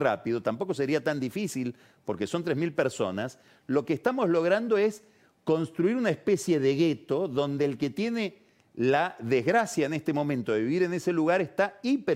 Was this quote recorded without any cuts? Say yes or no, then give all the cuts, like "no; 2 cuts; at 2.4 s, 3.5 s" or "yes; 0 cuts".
yes; 0 cuts